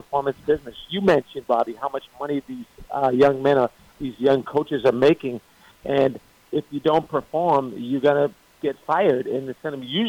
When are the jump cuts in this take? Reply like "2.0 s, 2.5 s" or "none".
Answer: none